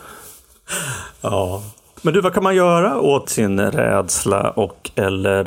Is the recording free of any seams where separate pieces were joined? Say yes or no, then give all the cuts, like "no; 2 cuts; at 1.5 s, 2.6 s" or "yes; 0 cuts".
no; 1 cut; at 3.2 s